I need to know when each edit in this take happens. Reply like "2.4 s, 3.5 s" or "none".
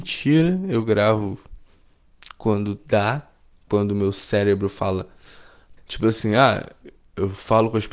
5.8 s